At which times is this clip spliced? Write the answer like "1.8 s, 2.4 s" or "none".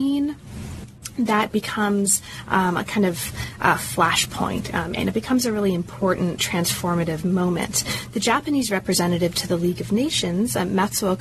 5.0 s